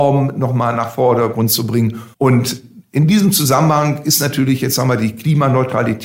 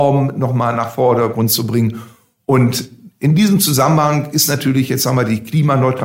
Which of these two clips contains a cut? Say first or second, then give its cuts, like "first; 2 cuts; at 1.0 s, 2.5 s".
first; 1 cut; at 2.1 s